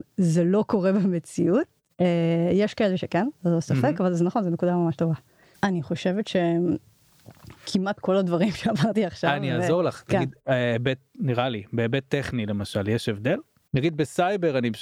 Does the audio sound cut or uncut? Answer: cut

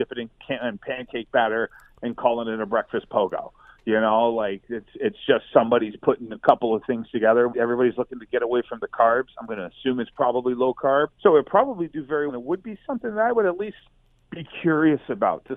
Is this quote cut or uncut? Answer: cut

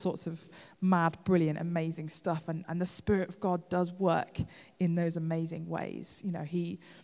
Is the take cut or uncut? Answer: uncut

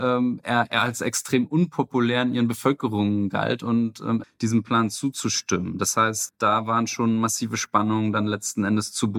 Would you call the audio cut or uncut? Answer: cut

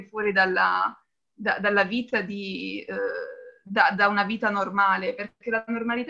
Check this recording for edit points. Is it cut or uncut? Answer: uncut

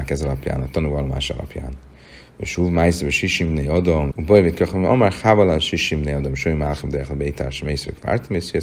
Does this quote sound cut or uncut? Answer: cut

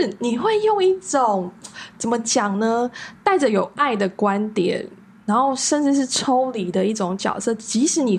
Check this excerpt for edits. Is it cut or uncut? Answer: uncut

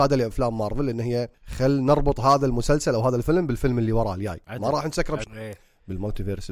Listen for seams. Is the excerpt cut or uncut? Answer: cut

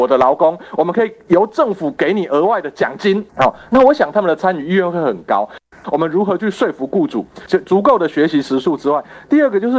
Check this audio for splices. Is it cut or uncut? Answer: cut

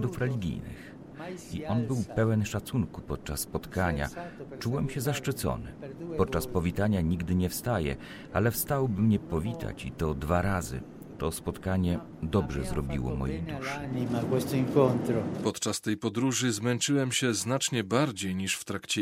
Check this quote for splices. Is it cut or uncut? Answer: cut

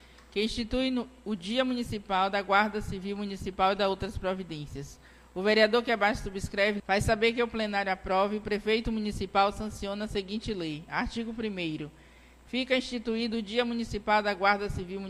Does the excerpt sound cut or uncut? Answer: cut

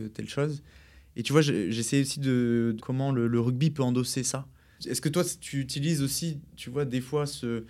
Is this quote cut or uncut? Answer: cut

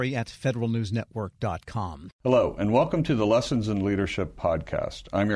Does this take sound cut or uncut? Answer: cut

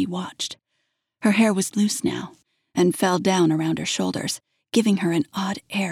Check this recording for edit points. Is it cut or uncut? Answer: uncut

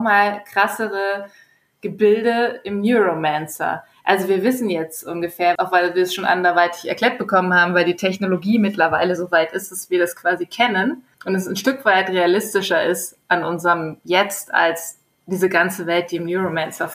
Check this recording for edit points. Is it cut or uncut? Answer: cut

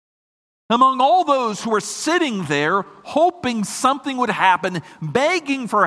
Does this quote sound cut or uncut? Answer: uncut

